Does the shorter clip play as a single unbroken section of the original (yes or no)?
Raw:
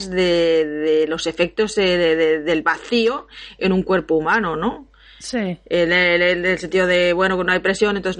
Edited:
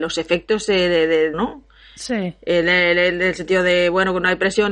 no